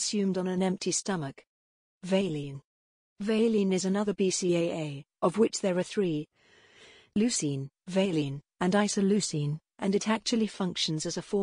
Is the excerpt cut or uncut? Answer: uncut